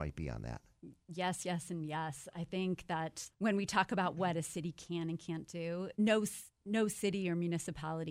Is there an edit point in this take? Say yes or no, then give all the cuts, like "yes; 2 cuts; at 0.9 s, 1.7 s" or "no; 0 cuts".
yes; 2 cuts; at 3.3 s, 5.9 s